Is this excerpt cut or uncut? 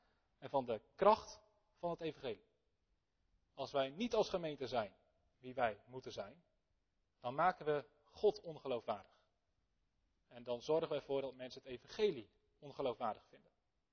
uncut